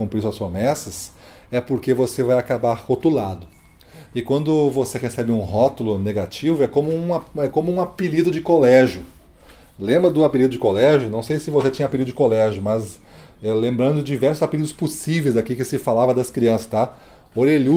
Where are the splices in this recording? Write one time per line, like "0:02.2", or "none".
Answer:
none